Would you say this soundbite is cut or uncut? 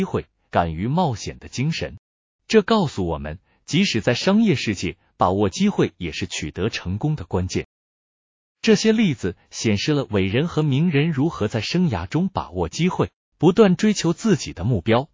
uncut